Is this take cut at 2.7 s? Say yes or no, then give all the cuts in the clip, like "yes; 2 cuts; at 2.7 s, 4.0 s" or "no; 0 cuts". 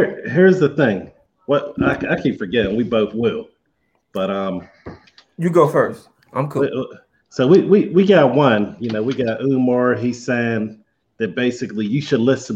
no; 0 cuts